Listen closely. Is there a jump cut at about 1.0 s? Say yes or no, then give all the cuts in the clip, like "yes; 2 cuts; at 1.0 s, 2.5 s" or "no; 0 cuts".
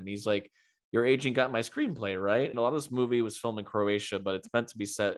no; 1 cut; at 2.5 s